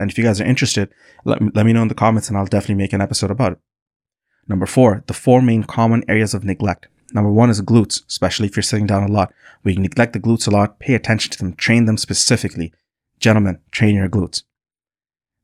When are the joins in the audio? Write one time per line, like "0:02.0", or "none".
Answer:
none